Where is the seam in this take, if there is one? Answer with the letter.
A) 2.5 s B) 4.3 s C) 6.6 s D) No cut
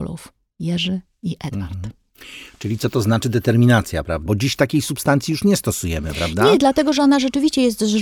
B